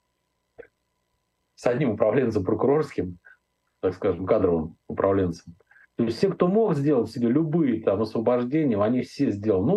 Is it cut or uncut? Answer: cut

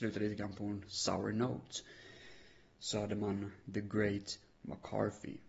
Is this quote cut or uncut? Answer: uncut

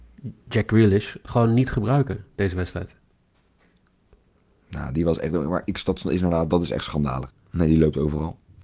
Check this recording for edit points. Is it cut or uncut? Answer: cut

